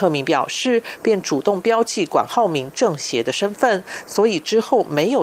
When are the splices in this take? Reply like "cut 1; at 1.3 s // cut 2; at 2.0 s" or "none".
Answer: cut 1; at 1.0 s